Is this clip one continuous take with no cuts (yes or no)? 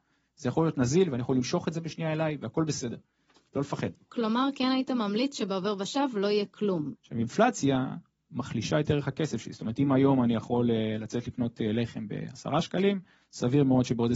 no